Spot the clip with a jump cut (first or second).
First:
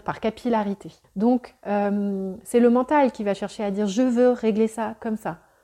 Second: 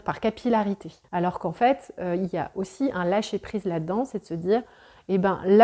second